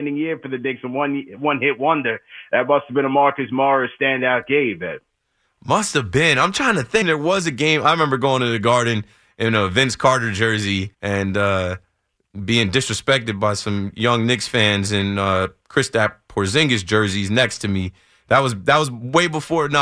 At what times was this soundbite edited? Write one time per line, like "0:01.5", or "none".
0:07.0
0:10.9